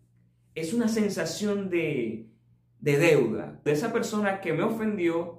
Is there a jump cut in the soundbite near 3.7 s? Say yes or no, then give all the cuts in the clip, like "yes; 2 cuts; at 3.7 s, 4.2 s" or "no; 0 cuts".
yes; 1 cut; at 3.7 s